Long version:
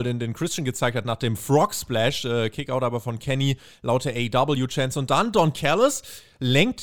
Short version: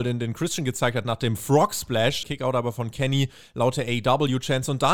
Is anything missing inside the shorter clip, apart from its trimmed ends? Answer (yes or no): yes